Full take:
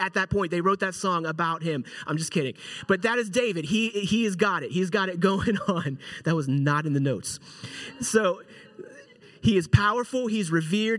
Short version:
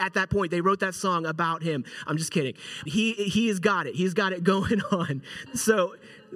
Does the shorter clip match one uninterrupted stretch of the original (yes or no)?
no